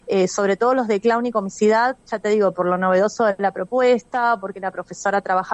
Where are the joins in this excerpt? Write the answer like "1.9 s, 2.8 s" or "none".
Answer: none